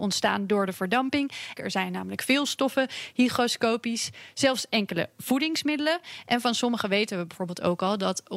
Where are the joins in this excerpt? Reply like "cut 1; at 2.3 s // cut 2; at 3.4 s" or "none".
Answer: cut 1; at 1.6 s